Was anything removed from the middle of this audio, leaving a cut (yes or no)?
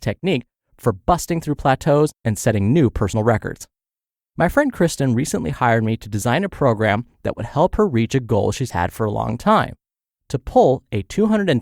no